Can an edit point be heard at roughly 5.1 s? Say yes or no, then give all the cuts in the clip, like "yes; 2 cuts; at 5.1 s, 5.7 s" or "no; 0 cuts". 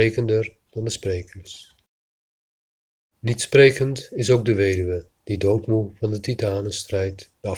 yes; 1 cut; at 5.1 s